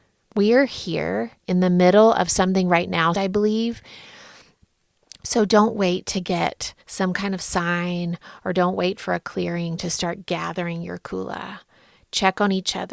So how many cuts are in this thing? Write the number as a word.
two